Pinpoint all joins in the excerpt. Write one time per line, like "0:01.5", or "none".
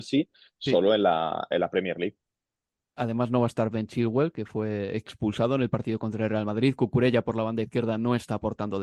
none